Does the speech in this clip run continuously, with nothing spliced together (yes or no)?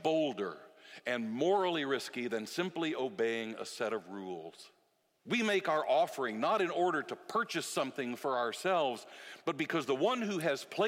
no